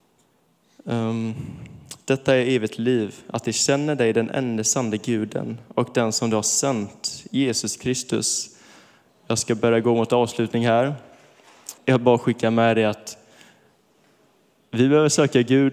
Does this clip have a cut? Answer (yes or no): yes